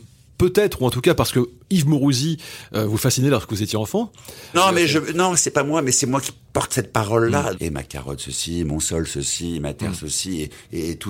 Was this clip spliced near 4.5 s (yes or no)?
yes